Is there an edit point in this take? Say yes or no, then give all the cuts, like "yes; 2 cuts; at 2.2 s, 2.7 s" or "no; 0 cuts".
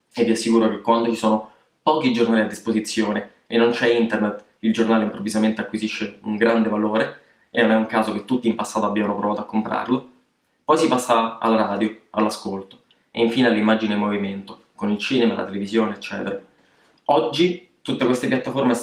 no; 0 cuts